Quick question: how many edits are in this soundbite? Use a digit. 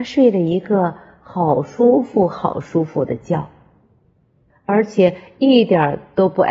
1